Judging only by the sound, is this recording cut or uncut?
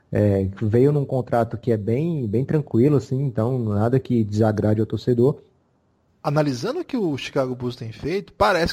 cut